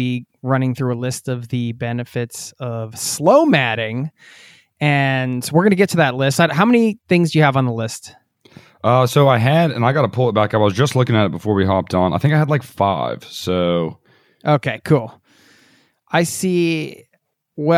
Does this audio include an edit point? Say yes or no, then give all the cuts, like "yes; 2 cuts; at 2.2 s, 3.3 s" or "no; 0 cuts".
no; 0 cuts